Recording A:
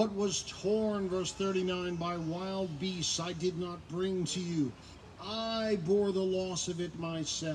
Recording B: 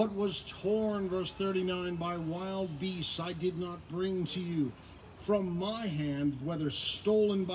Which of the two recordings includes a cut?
B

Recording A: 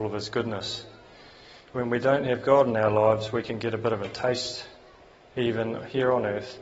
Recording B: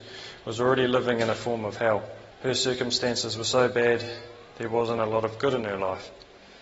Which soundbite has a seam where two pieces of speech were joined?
B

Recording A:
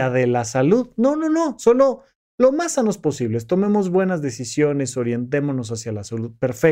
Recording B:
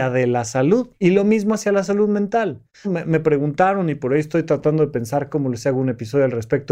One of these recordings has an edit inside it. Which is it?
B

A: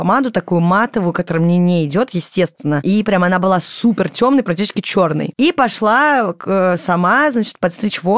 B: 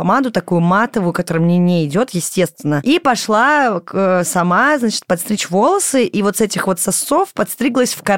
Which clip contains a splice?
B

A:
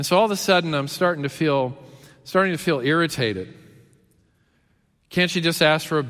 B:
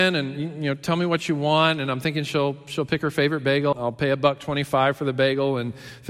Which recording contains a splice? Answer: B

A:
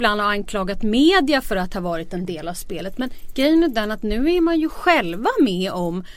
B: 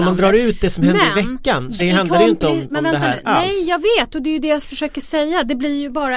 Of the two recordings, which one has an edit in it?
B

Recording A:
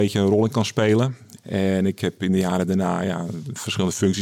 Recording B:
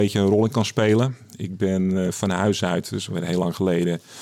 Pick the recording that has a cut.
A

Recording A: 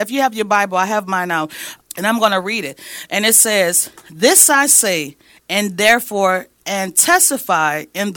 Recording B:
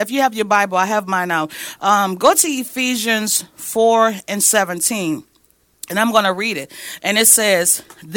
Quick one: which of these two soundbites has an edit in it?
A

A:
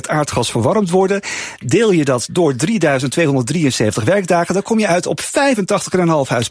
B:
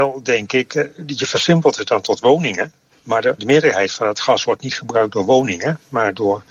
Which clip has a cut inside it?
B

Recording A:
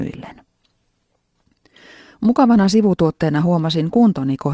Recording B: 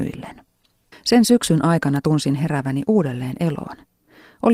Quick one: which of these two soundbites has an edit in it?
B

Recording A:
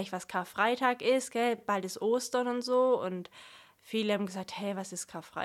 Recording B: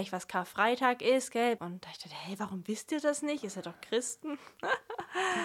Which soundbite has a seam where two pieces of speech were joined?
B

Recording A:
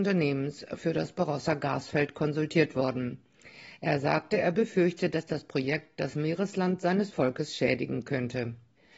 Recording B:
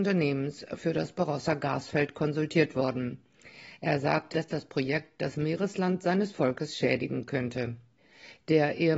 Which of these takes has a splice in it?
B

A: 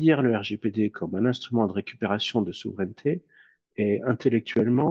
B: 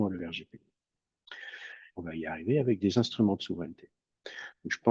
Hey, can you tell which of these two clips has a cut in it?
B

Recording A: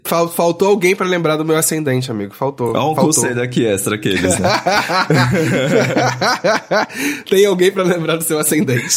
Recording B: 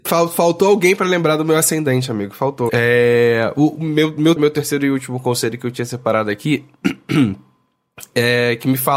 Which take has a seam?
B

